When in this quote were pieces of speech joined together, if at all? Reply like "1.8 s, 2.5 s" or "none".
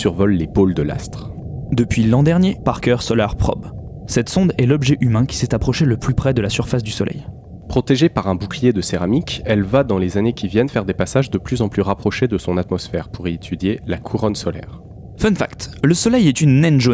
2.6 s